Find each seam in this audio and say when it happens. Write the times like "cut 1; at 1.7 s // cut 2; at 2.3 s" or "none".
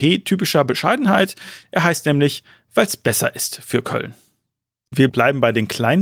cut 1; at 4.9 s